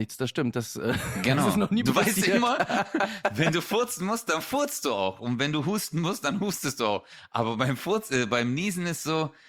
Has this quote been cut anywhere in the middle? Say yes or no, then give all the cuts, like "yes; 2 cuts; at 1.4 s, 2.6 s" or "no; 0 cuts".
no; 0 cuts